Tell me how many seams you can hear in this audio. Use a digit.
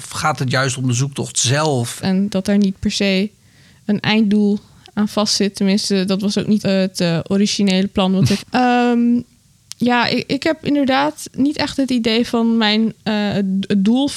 3